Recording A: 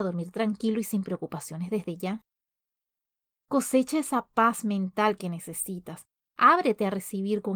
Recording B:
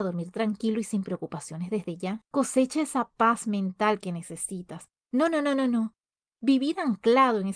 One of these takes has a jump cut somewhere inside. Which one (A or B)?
B